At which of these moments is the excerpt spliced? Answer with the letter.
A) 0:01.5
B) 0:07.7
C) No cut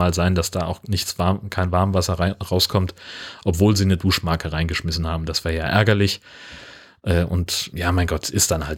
B